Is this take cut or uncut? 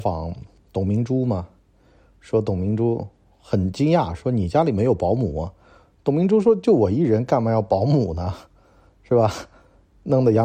uncut